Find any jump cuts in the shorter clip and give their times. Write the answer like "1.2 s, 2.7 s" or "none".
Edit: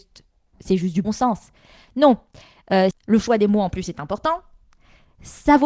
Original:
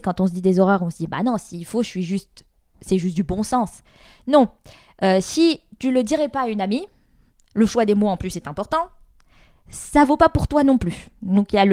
1.0 s, 2.9 s

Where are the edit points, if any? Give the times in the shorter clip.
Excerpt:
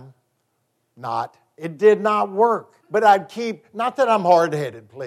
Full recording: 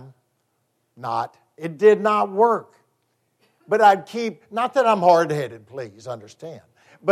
2.8 s

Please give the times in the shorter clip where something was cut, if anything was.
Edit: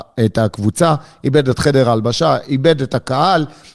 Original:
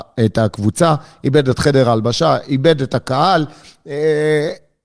none

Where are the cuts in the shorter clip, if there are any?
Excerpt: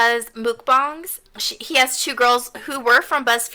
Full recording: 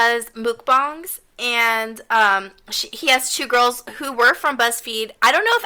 1.3 s

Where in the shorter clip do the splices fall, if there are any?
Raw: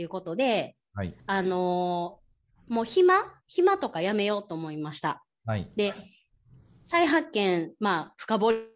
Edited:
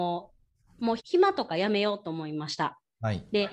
1.0 s

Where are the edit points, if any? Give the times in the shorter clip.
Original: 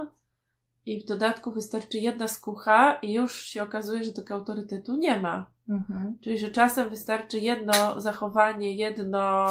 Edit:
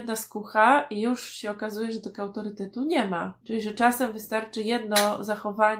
3.4 s

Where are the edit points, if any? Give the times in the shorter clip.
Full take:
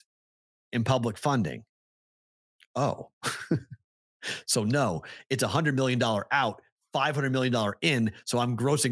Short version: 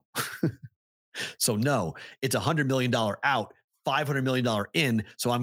none

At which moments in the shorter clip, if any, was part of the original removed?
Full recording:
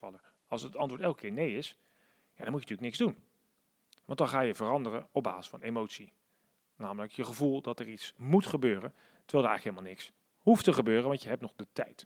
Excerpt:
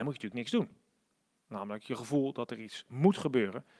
1.4 s

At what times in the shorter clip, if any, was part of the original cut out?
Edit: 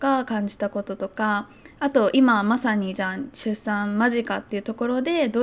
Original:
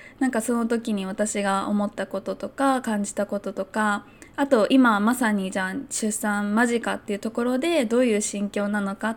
none

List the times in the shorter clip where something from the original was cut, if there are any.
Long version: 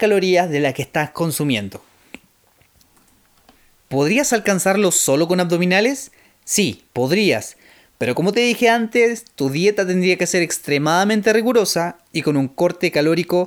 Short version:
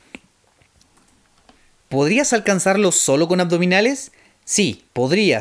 none

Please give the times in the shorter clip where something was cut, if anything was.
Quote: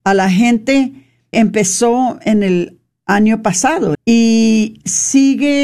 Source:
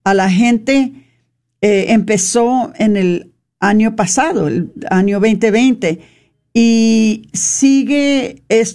1.3 s, 3.9 s

